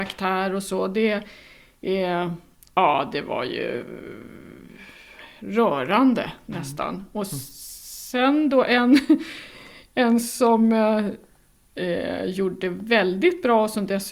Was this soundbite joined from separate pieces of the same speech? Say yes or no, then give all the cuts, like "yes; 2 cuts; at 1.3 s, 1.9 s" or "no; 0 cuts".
no; 0 cuts